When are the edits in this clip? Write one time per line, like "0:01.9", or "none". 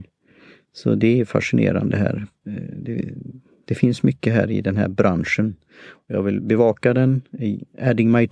none